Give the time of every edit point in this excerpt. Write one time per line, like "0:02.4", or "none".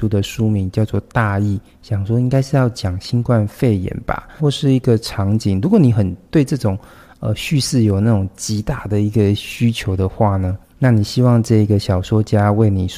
0:04.4

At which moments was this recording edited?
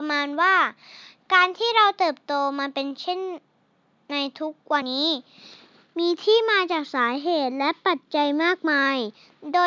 0:04.8

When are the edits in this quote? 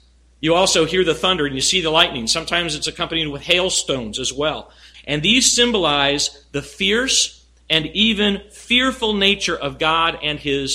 0:04.9

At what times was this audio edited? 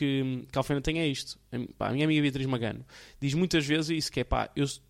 none

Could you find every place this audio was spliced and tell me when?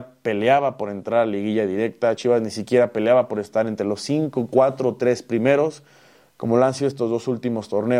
none

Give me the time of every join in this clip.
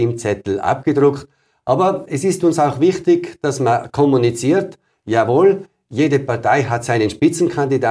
none

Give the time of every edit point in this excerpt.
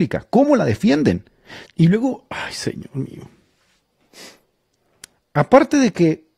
0:01.7

